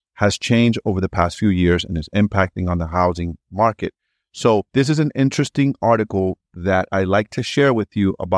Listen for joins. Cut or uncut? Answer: cut